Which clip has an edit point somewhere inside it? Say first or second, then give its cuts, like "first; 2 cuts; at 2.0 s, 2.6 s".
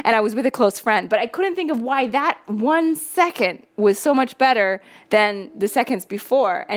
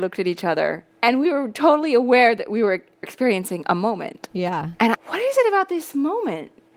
second; 2 cuts; at 0.9 s, 4.9 s